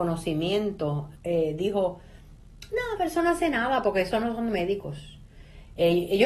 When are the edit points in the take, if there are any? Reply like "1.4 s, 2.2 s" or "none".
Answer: 1.2 s